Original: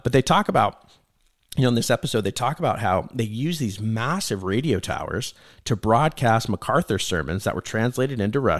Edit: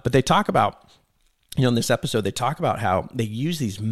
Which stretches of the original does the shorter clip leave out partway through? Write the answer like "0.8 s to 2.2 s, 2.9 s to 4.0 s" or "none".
none